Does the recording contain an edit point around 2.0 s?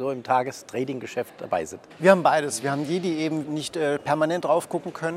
yes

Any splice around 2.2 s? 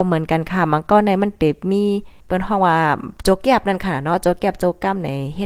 yes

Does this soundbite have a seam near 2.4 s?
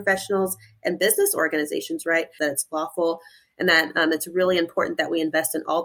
yes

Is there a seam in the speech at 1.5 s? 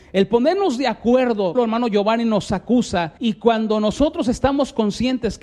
yes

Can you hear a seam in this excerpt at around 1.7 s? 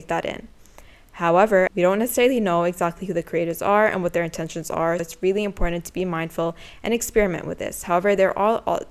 yes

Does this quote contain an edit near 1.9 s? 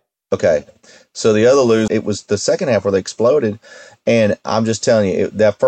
yes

